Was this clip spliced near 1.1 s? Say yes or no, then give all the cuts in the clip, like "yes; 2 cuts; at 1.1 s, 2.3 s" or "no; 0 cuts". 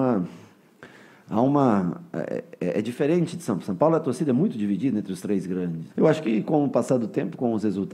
no; 1 cut; at 5.9 s